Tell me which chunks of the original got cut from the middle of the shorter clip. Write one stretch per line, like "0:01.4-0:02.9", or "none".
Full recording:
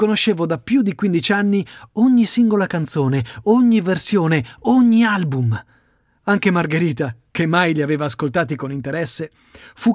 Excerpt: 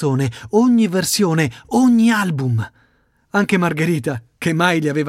none